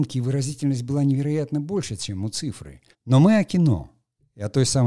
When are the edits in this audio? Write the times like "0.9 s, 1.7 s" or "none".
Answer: 2.9 s